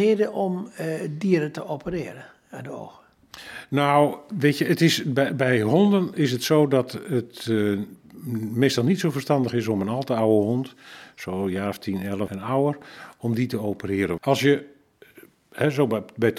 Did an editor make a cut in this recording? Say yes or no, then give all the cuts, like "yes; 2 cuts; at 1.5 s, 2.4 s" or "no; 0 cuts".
yes; 2 cuts; at 12.3 s, 14.2 s